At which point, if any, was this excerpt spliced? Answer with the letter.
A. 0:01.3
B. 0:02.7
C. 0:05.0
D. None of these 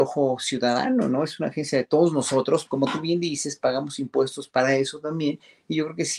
B